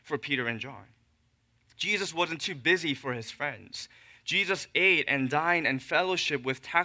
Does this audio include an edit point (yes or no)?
no